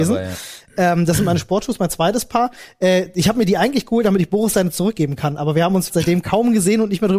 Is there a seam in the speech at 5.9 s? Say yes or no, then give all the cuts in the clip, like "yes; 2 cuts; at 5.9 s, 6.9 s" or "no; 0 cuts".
yes; 1 cut; at 5.9 s